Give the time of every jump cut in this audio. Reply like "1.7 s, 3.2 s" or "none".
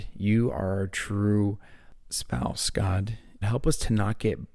3.4 s

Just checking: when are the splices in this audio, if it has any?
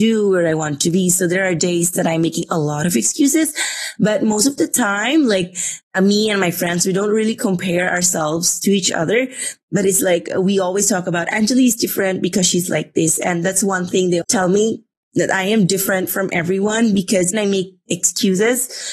14.2 s, 17.3 s

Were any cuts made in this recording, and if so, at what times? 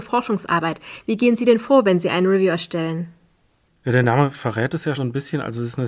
4.9 s

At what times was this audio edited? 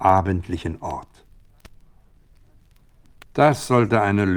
none

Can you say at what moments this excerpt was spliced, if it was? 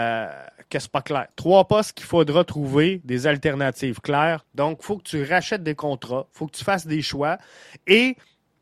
4.4 s

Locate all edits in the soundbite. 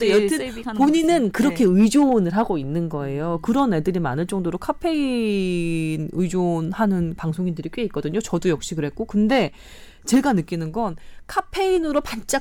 none

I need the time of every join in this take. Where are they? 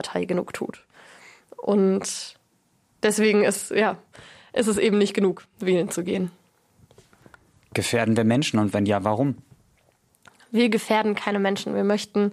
none

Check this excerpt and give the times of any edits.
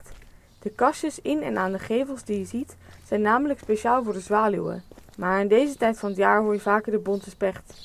5.1 s

